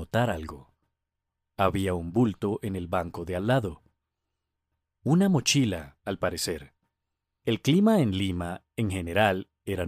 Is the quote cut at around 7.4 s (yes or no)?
yes